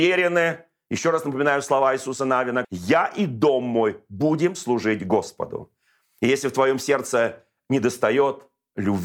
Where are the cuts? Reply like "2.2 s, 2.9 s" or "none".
2.6 s